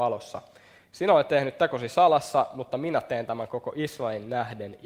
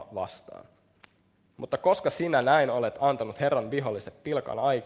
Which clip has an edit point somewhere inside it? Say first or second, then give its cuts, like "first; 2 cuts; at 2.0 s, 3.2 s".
second; 1 cut; at 1.5 s